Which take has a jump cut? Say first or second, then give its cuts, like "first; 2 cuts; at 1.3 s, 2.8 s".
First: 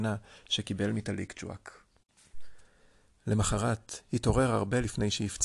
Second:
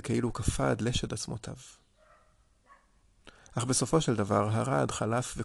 first; 1 cut; at 3.1 s